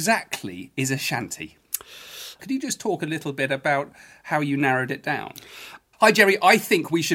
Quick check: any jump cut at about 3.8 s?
no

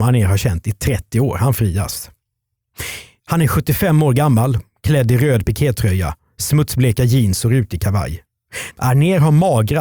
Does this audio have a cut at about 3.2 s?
yes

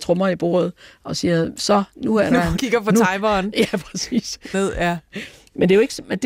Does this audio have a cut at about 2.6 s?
yes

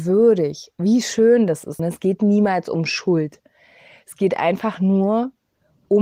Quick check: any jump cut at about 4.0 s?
no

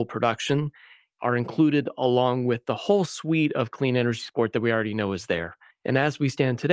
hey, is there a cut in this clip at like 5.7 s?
yes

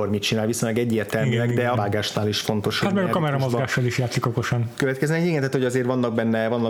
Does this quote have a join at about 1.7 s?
yes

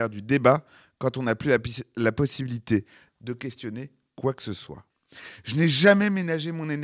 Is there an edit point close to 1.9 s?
no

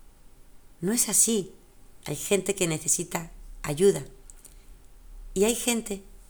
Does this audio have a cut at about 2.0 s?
yes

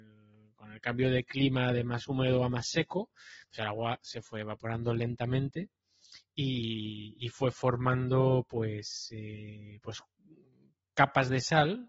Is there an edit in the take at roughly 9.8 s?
no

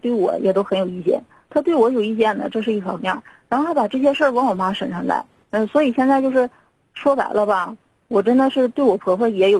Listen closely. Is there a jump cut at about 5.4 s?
yes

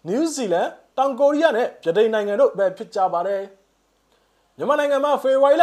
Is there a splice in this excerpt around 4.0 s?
no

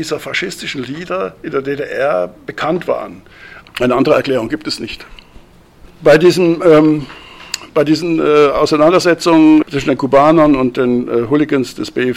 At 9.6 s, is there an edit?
yes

